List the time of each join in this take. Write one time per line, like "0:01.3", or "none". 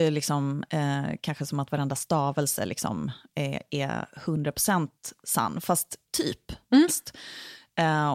0:06.9